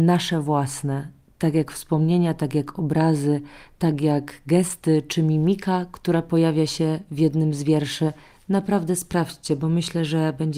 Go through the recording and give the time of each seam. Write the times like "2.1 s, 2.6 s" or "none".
none